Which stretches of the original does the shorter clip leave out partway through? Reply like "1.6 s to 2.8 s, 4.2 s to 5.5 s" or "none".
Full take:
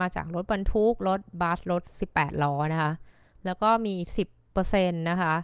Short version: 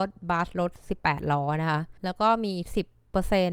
3.1 s to 3.4 s